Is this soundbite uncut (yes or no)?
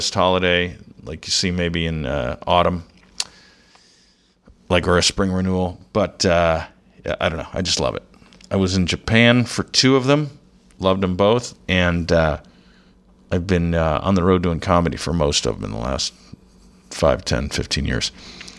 no